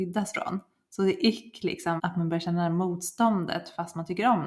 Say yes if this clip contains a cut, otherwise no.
yes